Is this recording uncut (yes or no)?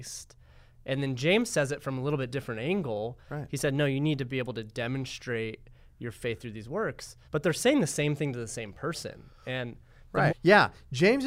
no